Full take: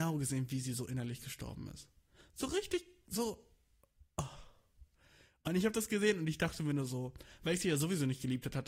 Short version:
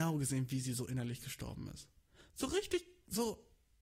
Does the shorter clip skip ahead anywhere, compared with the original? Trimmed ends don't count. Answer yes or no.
no